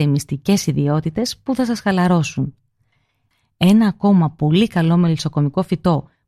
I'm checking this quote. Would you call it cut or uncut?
uncut